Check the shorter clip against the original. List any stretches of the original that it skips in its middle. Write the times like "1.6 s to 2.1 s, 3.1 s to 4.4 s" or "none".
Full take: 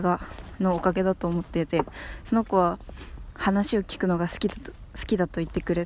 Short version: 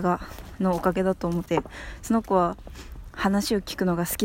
1.5 s to 1.7 s